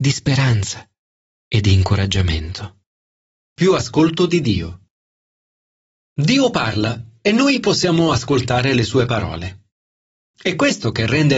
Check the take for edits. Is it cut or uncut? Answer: cut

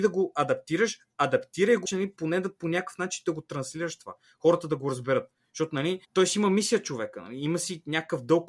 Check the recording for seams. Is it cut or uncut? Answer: cut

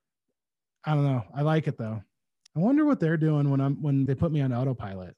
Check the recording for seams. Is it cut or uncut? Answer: cut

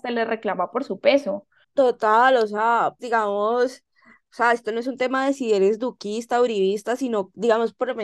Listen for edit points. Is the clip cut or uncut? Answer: cut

